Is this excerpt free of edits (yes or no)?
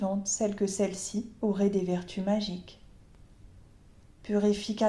yes